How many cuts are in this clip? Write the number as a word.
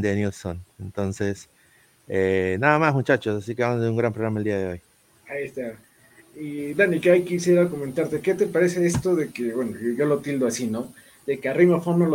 zero